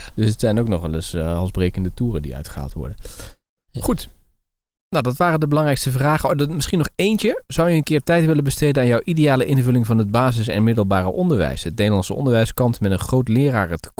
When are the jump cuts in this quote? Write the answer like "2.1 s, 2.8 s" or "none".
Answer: none